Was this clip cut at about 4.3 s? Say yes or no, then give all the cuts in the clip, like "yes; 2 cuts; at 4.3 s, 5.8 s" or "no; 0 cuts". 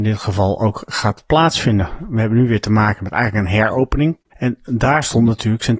yes; 1 cut; at 4.3 s